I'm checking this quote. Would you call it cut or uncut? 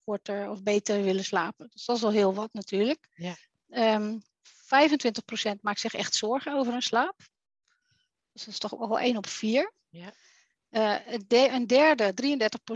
uncut